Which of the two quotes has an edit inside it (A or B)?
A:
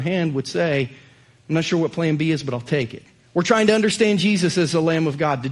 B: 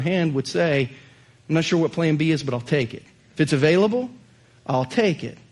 A